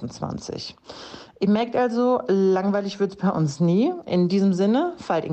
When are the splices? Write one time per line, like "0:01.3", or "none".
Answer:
none

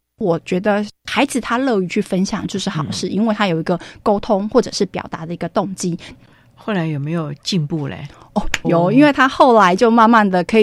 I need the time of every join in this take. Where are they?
0:06.2
0:08.6

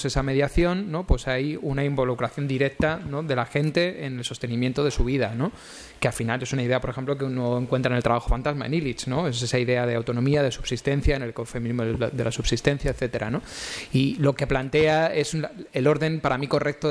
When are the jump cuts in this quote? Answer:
none

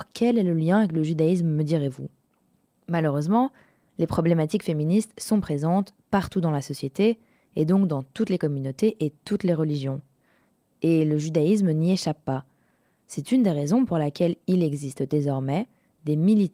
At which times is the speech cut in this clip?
none

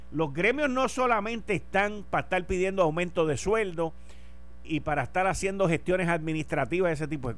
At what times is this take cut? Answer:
0:04.6

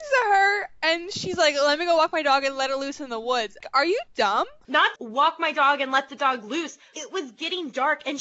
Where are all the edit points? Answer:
0:04.9
0:06.9

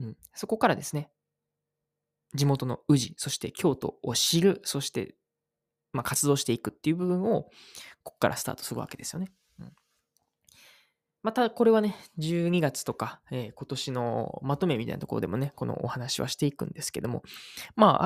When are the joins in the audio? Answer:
none

